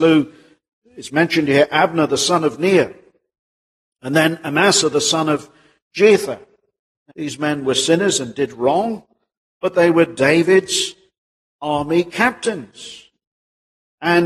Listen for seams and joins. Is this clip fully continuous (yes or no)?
no